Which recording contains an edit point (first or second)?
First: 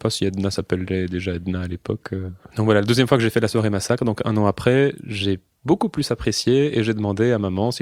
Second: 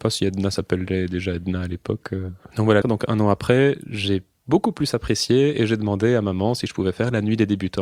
second